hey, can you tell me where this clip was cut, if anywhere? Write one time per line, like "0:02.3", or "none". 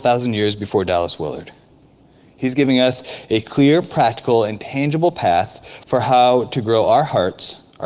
none